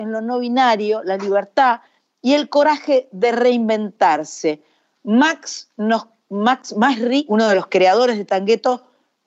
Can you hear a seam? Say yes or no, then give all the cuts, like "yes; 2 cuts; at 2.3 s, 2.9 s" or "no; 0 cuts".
yes; 1 cut; at 7.3 s